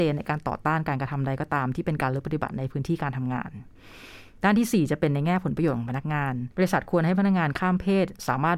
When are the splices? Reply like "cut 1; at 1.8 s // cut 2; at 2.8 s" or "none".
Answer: cut 1; at 6.5 s